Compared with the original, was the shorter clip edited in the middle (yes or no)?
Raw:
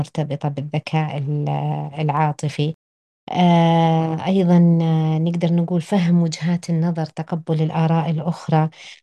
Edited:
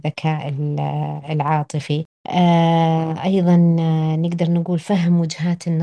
yes